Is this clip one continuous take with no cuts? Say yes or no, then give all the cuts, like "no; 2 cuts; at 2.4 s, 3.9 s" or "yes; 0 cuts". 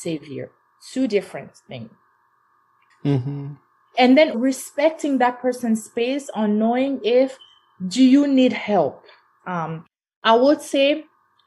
no; 3 cuts; at 2.9 s, 4.3 s, 9.4 s